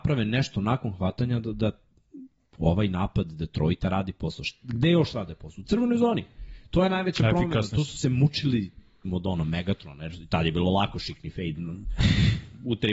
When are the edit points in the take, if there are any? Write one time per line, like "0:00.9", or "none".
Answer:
0:09.0